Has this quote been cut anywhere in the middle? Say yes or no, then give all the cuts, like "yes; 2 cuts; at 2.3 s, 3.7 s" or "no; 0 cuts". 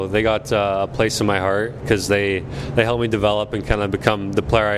no; 0 cuts